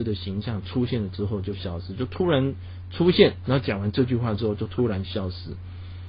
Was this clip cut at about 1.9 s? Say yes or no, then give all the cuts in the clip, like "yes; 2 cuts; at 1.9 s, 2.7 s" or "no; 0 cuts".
no; 0 cuts